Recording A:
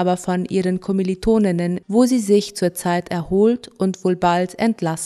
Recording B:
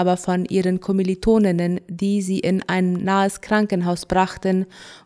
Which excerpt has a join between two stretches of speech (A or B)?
A